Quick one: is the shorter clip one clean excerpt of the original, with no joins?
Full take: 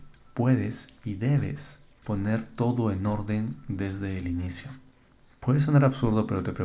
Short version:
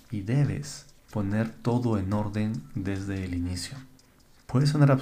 yes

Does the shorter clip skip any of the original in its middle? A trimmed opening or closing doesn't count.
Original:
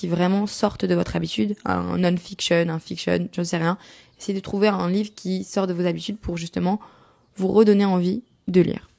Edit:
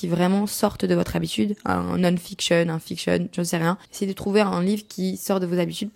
yes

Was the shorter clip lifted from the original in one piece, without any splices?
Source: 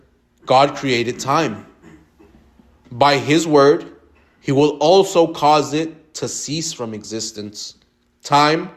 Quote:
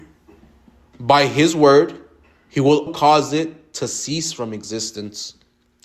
no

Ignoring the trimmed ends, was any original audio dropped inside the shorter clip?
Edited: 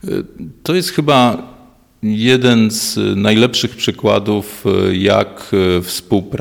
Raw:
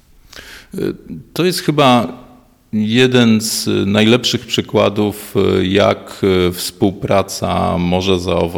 no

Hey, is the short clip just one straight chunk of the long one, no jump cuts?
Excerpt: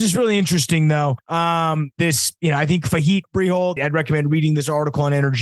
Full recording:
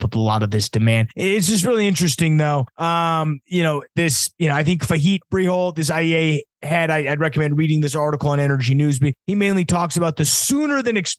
no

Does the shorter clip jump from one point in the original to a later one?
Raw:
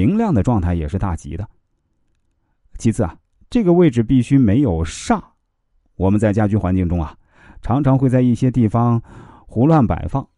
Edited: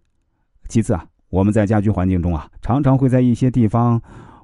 yes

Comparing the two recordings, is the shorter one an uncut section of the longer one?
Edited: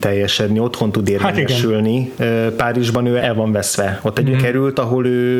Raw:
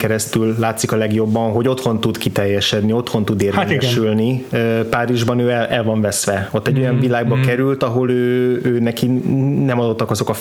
no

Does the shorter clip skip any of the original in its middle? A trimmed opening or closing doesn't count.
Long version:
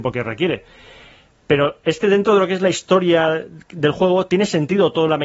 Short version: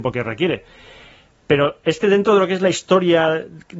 no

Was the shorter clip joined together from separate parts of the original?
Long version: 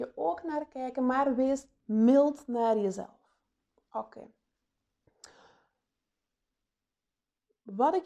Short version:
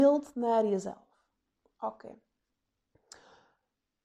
no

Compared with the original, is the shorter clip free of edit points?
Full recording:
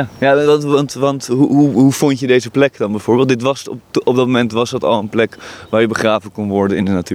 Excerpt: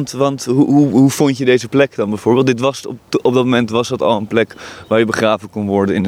yes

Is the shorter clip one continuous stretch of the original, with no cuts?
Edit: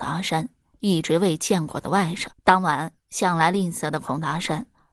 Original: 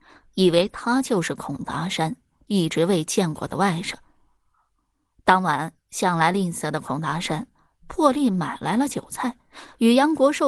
no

